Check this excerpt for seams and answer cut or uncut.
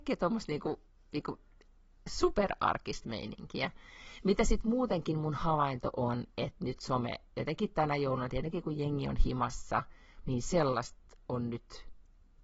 cut